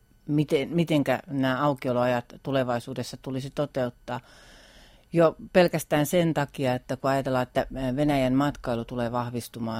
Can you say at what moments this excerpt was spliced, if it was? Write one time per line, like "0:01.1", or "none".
none